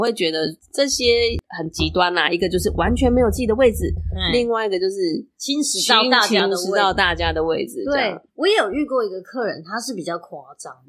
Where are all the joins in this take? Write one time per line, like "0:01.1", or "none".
0:08.3